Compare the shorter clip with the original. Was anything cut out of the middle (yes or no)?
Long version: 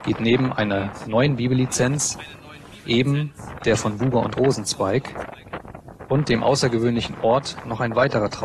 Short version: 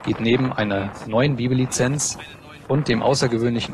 yes